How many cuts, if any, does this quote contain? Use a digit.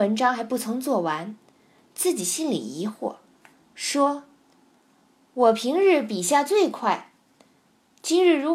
0